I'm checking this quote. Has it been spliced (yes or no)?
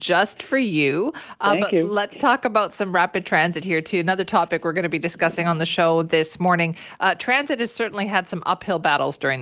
no